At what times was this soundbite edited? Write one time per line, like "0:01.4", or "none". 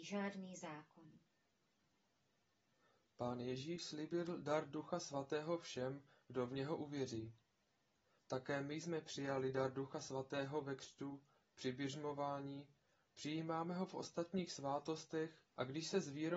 0:15.5